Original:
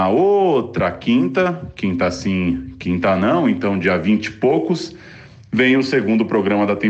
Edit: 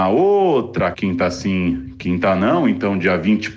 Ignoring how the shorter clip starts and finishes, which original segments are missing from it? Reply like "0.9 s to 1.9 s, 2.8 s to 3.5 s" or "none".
0.9 s to 1.7 s